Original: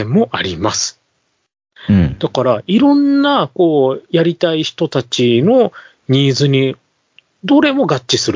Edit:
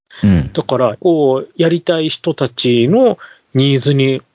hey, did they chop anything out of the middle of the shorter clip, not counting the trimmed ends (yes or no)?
yes